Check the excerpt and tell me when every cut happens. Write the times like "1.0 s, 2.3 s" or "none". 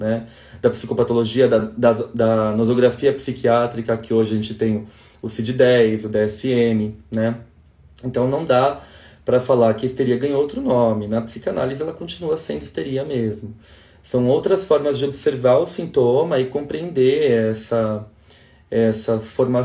none

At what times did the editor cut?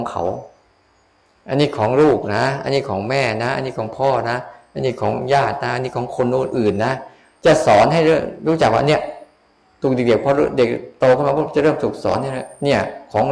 none

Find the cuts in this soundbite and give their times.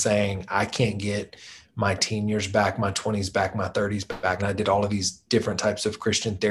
4.4 s

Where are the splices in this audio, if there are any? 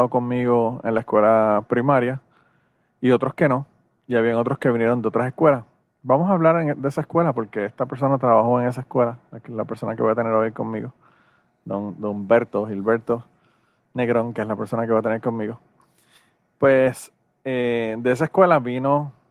5.8 s

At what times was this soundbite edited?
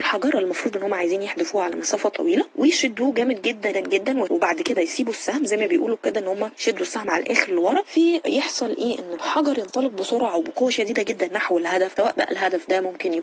3.7 s

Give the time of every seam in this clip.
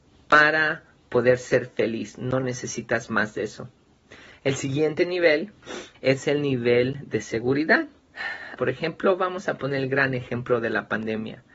5.9 s, 8.6 s

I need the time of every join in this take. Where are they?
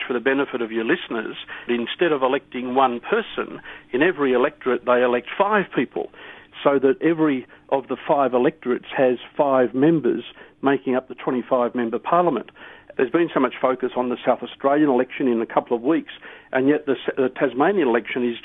1.7 s, 12.9 s

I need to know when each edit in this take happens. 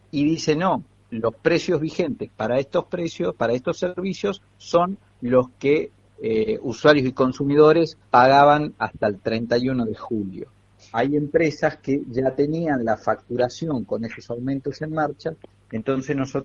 8.0 s, 10.9 s

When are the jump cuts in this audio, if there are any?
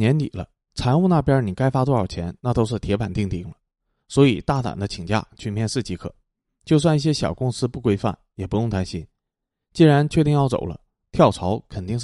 none

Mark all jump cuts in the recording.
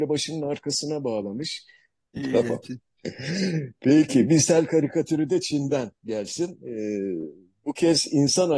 2.1 s

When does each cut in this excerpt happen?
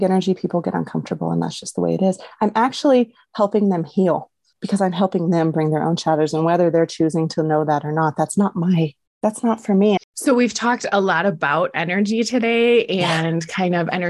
10.0 s

